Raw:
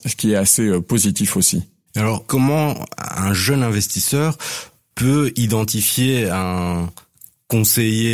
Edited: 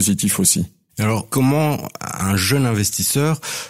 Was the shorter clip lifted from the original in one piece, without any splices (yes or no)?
yes